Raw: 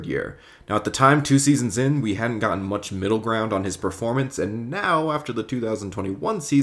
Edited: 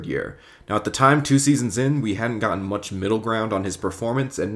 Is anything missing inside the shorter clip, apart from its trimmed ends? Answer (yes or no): no